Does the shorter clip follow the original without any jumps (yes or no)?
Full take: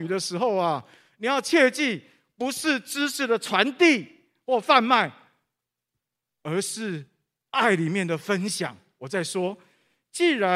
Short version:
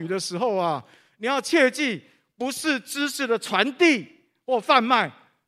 yes